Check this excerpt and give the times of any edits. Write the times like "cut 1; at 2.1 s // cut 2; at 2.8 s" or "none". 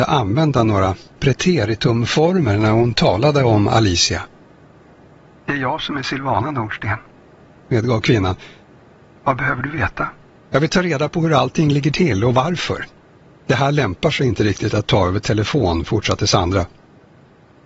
cut 1; at 10.5 s // cut 2; at 13.3 s